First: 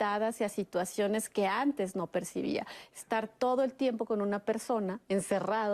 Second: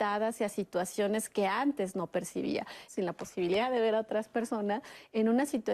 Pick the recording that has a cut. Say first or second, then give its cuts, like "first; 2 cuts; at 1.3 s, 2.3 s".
second; 1 cut; at 2.9 s